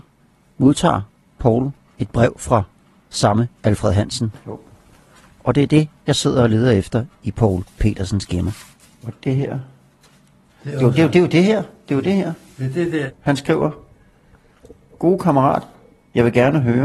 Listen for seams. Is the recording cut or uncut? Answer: uncut